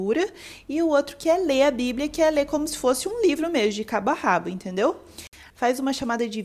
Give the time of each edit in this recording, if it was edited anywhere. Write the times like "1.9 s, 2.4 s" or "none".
5.5 s